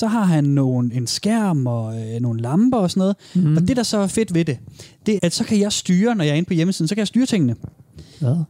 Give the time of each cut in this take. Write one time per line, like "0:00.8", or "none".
0:05.2